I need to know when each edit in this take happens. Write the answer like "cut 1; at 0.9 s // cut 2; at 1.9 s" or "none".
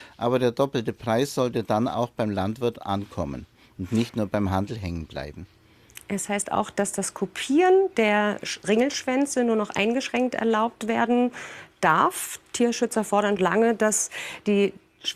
cut 1; at 13.4 s